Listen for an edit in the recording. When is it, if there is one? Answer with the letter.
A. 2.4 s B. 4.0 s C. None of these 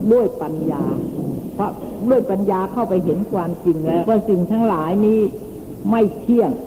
B